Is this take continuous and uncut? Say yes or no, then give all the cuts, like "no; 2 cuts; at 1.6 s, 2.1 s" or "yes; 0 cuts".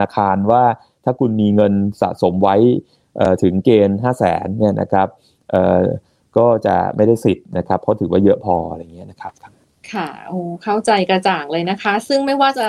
yes; 0 cuts